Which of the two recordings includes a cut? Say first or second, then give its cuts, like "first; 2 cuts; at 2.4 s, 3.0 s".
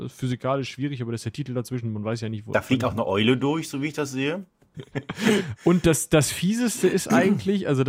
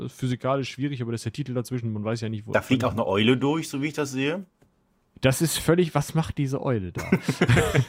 first; 1 cut; at 4.7 s